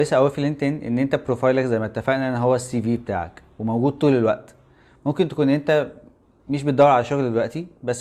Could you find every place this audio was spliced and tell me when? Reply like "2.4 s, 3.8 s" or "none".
none